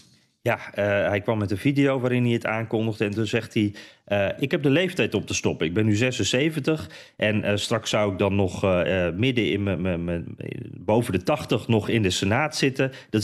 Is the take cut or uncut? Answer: uncut